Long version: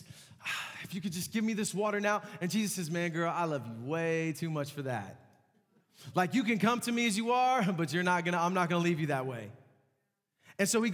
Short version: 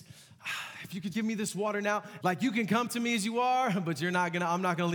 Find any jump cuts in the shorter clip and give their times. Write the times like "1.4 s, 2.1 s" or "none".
1.1 s, 2.2 s